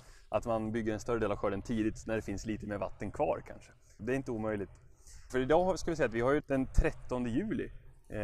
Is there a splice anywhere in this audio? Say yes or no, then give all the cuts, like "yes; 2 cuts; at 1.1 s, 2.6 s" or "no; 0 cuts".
yes; 3 cuts; at 4.0 s, 5.3 s, 6.4 s